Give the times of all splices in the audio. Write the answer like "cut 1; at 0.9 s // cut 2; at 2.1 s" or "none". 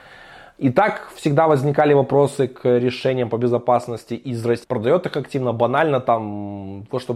cut 1; at 4.6 s